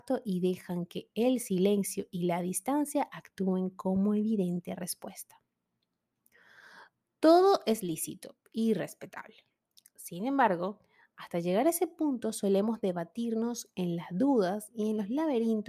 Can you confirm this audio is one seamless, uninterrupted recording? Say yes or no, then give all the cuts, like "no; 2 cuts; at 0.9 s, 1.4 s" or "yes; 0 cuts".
yes; 0 cuts